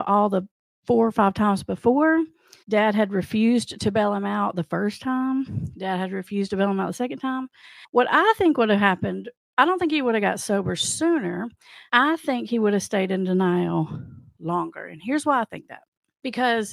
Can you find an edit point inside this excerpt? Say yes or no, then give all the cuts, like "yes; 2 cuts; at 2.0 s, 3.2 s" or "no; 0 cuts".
no; 0 cuts